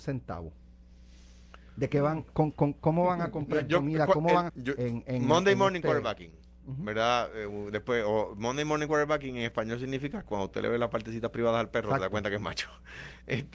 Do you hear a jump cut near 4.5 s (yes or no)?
yes